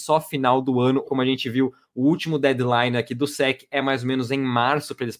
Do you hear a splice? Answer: yes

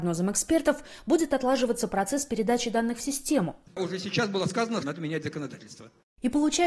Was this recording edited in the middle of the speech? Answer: yes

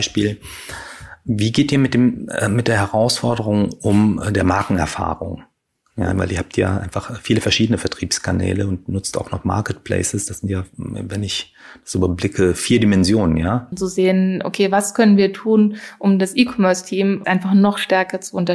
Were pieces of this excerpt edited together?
yes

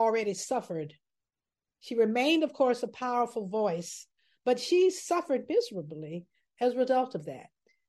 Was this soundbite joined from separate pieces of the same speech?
yes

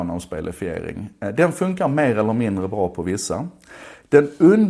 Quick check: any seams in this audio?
no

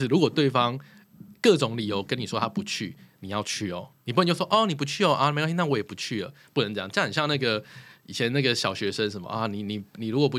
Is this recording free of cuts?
yes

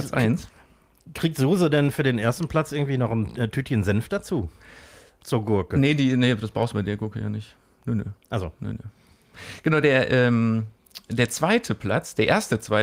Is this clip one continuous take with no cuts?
yes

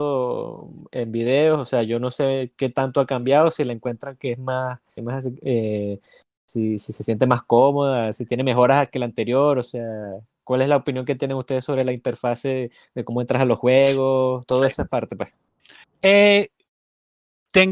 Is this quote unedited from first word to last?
no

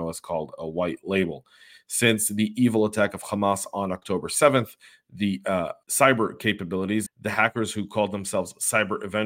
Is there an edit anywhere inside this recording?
yes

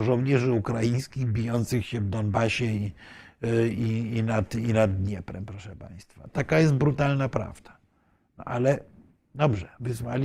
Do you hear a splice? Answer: no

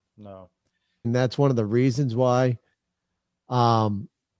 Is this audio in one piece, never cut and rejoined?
no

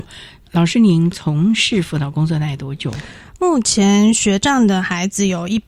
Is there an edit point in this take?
yes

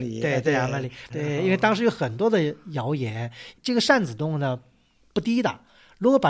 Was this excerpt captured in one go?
no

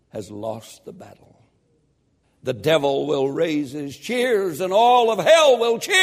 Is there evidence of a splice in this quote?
yes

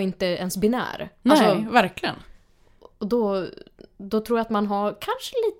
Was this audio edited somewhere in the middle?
no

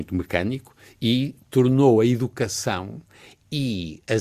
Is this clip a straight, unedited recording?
yes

